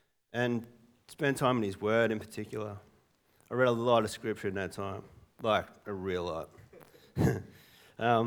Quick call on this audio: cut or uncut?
uncut